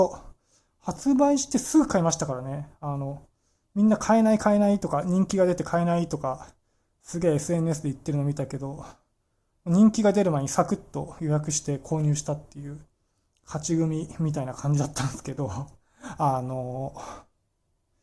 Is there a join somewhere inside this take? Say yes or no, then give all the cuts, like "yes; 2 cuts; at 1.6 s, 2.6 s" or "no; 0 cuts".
no; 0 cuts